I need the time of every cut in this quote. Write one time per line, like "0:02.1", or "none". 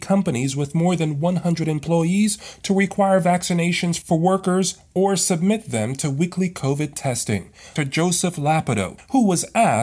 0:07.8